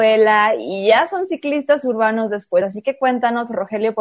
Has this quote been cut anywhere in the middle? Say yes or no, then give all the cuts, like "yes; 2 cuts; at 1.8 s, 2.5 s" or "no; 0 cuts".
no; 0 cuts